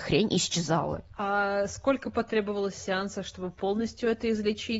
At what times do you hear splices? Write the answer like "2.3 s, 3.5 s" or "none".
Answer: none